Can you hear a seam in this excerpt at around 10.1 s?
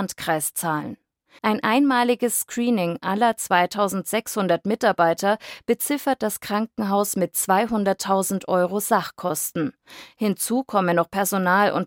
no; 1 cut; at 1.4 s

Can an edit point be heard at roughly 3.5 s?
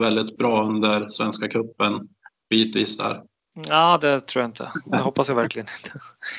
yes; 1 cut; at 3.5 s

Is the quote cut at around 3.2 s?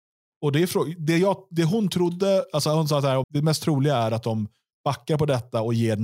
yes; 1 cut; at 3.2 s

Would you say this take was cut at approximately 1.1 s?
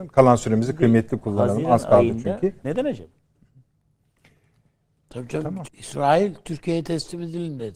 no; 2 cuts; at 2.6 s, 5.6 s

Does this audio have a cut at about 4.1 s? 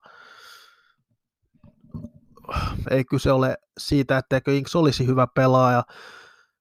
no; 1 cut; at 2.8 s

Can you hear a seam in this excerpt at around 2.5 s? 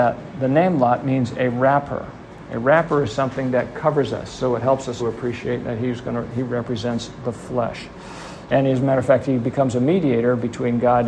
no; 2 cuts; at 5.0 s, 8.5 s

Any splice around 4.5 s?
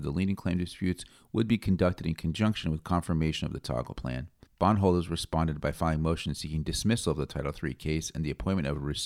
yes; 1 cut; at 4.5 s

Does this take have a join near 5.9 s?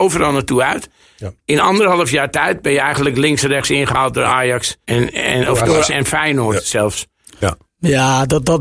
yes; 2 cuts; at 4.8 s, 5.9 s

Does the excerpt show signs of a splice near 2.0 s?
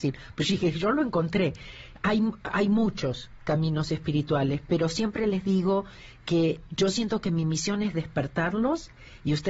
no; 0 cuts

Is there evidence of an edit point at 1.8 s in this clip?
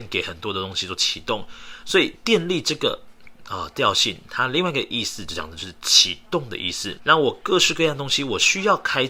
no; 1 cut; at 7.0 s

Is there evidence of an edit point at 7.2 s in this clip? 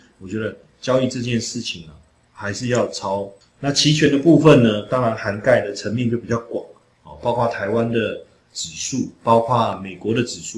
no; 1 cut; at 3.4 s

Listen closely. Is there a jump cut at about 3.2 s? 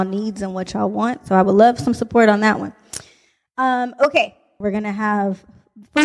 no; 1 cut; at 4.6 s

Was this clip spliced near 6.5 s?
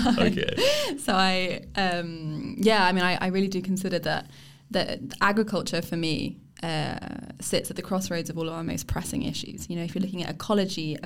no; 0 cuts

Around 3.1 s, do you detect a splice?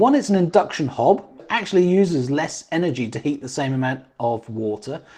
no; 1 cut; at 1.4 s

